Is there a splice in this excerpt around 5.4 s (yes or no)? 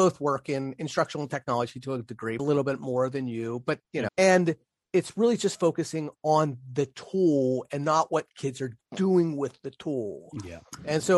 no